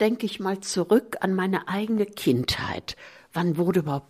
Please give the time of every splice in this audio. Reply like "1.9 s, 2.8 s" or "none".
none